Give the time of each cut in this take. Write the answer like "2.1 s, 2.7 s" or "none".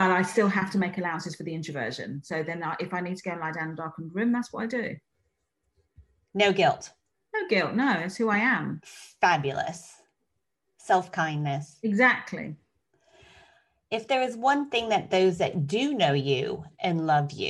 none

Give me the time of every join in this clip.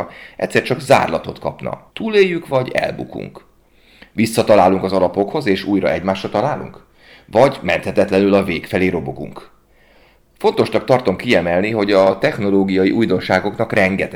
1.9 s

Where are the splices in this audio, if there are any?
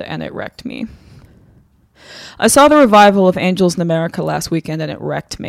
none

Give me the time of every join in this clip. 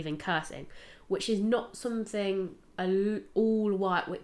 none

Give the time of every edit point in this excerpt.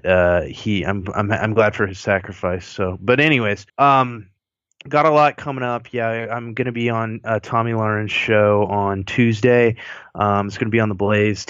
3.7 s

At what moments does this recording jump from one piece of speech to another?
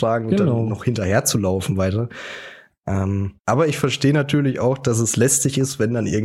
3.4 s

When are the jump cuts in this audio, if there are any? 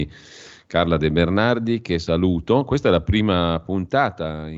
none

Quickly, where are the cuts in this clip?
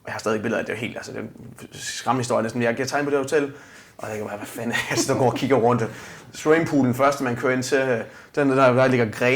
none

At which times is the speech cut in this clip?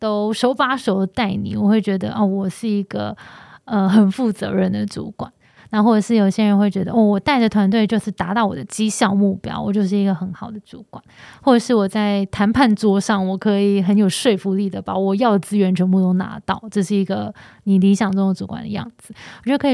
none

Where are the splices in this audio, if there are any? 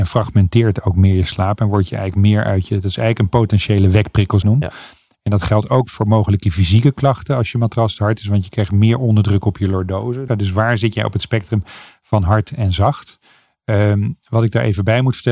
4.4 s, 10.3 s

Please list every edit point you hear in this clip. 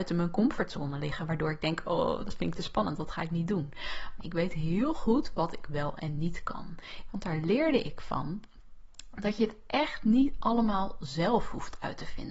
4.2 s, 7.1 s

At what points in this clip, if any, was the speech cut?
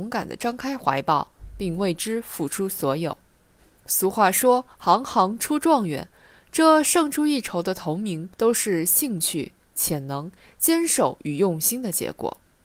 8.3 s

